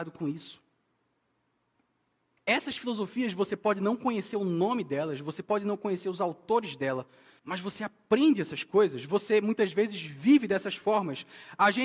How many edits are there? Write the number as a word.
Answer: two